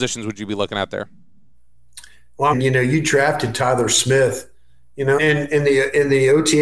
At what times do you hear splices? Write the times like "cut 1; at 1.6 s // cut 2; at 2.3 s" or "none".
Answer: cut 1; at 2.5 s // cut 2; at 5.2 s